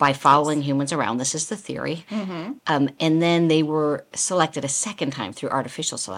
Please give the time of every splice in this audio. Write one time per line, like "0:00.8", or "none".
0:02.6